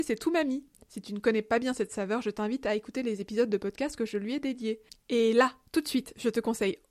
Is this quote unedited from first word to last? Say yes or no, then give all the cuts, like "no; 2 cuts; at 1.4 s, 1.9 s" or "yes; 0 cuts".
no; 1 cut; at 5.0 s